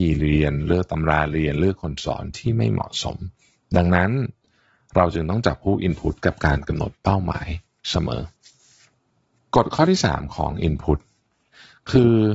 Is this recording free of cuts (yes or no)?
yes